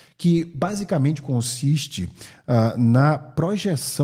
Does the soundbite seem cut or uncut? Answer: uncut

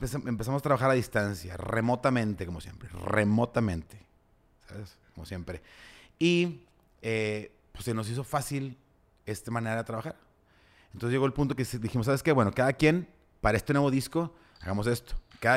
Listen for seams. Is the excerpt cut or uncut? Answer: uncut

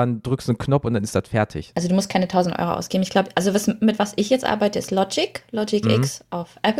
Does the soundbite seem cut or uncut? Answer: cut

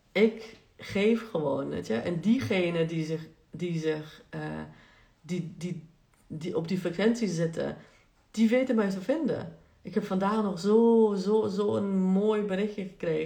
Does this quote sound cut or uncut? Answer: uncut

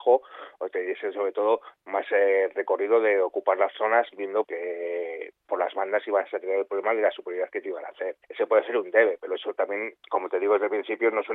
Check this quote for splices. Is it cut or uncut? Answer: cut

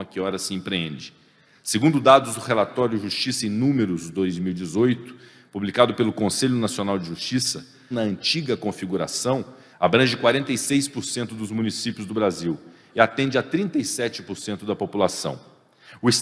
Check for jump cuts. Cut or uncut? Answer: cut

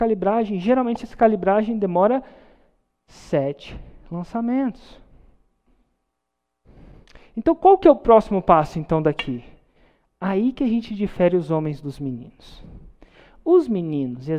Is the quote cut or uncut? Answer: uncut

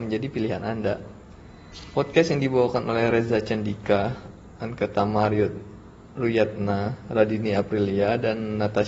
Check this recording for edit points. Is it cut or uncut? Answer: uncut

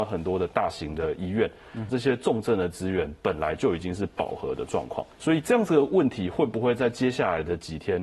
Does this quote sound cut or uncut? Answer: cut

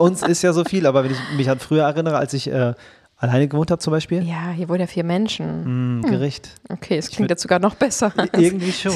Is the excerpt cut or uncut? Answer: cut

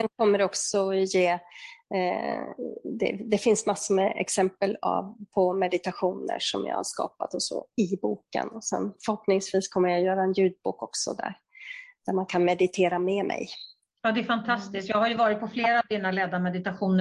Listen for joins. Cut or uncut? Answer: uncut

